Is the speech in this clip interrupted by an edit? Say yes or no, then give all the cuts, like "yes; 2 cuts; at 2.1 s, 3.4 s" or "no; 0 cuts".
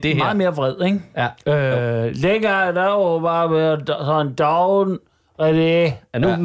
no; 0 cuts